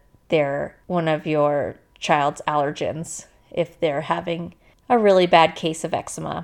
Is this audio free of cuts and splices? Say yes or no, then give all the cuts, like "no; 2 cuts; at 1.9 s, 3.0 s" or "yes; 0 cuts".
yes; 0 cuts